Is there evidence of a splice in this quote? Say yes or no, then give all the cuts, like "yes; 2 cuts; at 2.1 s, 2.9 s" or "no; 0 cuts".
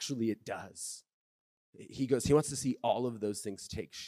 yes; 1 cut; at 1.6 s